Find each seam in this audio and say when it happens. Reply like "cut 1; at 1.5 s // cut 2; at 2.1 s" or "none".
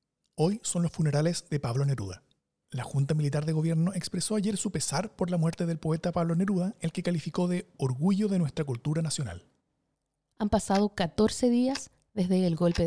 cut 1; at 2.6 s // cut 2; at 10.3 s